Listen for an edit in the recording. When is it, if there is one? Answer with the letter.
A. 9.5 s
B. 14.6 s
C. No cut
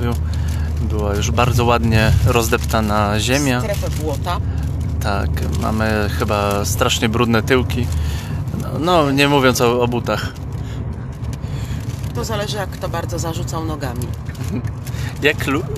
C